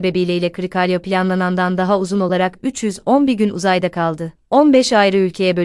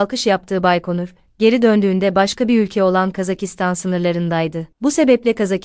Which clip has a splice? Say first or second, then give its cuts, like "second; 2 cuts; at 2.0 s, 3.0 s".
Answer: first; 1 cut; at 4.3 s